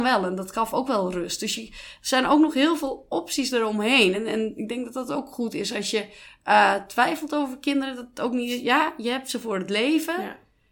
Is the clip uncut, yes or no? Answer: yes